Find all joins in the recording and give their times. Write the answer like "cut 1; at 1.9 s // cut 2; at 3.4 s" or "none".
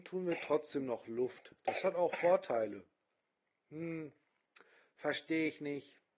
none